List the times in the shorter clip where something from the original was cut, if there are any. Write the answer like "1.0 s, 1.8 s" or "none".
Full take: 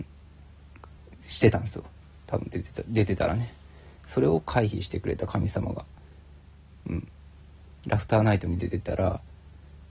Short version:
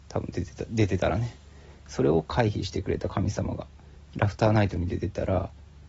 4.0 s